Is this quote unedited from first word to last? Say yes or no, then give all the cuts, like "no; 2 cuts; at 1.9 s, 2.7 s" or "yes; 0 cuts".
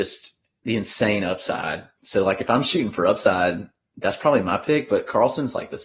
yes; 0 cuts